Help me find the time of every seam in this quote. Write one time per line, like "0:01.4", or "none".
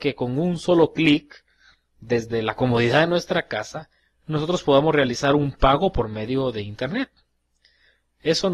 none

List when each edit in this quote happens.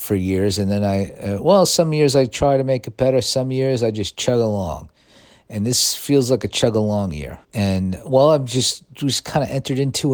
0:07.4

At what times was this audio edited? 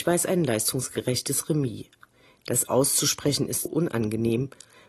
0:03.7

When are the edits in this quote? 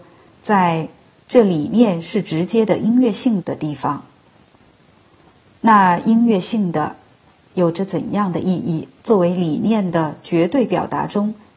0:03.4
0:09.0

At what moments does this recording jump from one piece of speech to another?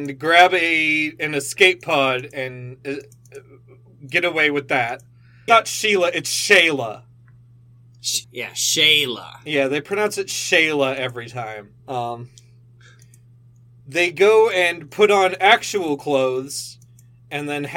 0:05.5
0:08.2
0:11.8

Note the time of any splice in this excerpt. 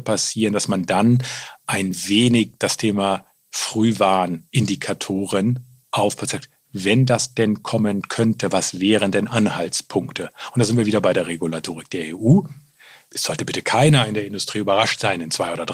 0:02.6

